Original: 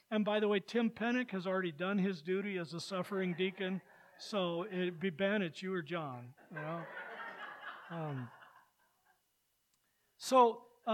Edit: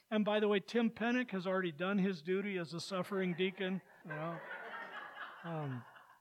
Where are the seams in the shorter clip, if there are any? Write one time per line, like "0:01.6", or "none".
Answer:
0:04.0